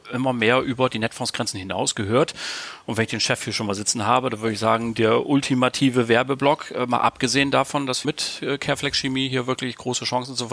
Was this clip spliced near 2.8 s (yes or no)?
no